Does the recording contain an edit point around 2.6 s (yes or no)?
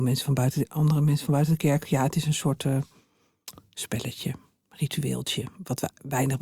no